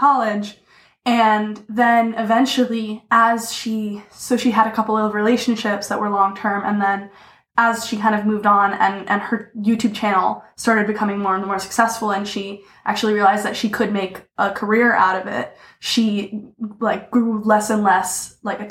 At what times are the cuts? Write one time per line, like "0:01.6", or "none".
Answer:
none